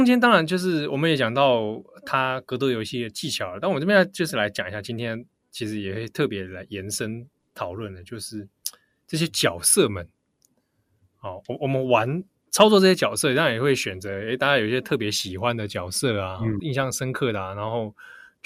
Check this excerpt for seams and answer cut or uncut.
uncut